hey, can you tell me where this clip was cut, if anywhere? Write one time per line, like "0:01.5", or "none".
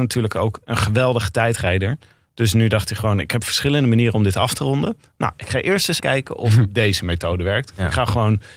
0:06.0